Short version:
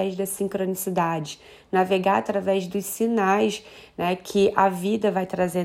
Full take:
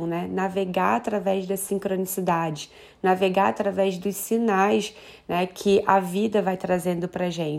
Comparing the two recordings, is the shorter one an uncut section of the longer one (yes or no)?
yes